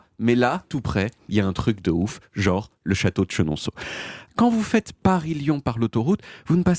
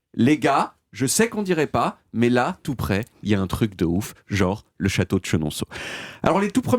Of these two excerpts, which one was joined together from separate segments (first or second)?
first